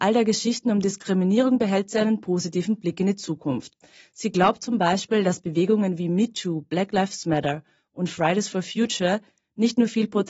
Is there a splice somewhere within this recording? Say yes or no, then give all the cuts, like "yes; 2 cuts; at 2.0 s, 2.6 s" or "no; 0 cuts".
no; 0 cuts